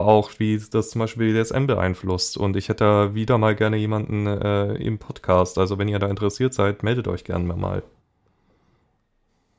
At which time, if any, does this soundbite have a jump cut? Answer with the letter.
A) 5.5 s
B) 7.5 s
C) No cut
C